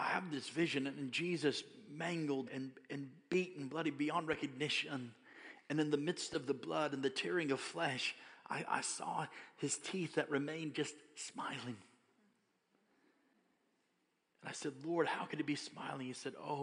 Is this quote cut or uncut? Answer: cut